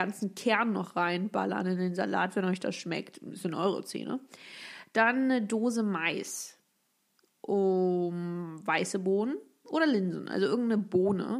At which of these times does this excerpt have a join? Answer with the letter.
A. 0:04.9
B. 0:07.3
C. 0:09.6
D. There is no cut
C